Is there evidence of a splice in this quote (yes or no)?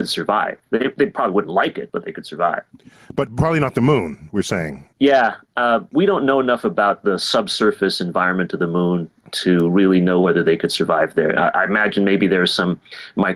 no